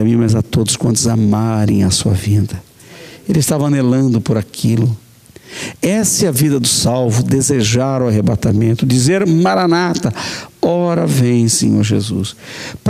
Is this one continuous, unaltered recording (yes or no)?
yes